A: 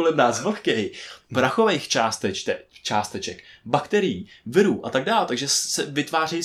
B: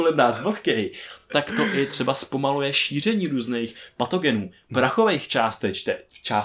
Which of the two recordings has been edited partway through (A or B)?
A